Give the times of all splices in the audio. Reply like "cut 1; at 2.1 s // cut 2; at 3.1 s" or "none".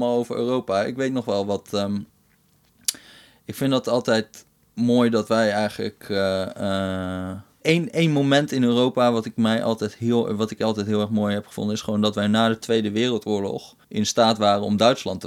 cut 1; at 7.6 s // cut 2; at 13.8 s